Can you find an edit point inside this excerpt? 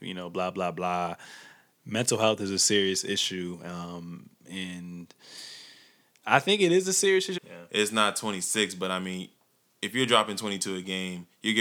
yes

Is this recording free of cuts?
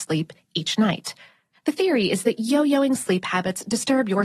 yes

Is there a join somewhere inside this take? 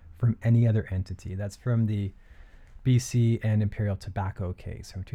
no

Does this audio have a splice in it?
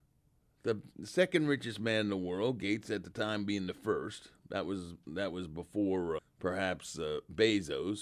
yes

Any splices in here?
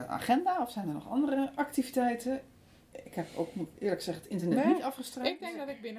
no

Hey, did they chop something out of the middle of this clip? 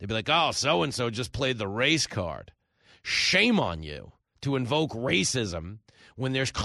no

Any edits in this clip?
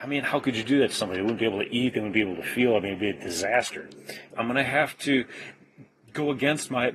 yes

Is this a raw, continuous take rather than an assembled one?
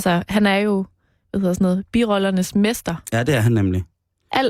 yes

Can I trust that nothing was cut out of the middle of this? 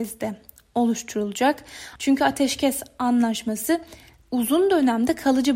no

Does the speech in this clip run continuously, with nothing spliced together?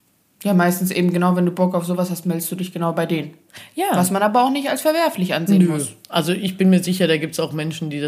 yes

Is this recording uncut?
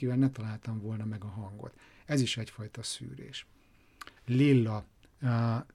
no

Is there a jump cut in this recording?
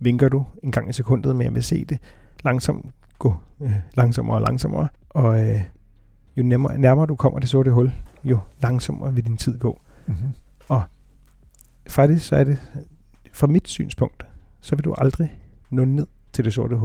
no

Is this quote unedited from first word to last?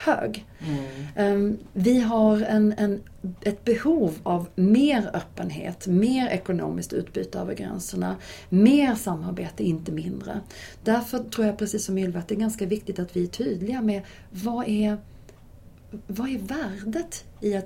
yes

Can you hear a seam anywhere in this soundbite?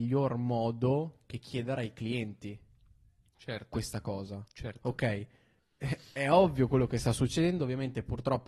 yes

